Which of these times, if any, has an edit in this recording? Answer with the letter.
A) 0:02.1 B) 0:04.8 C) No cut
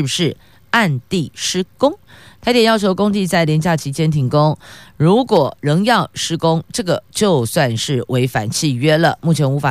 C